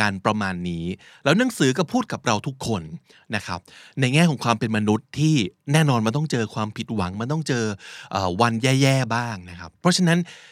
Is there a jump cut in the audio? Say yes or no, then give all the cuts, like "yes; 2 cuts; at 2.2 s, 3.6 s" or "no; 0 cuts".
no; 0 cuts